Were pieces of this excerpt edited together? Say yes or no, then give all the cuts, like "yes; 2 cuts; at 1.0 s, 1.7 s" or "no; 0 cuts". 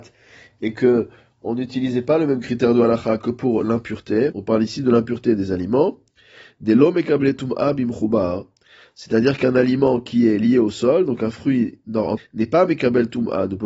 yes; 2 cuts; at 4.3 s, 12.2 s